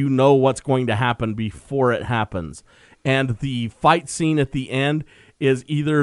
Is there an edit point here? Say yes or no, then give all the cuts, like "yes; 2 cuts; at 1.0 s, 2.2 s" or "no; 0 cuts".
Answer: no; 0 cuts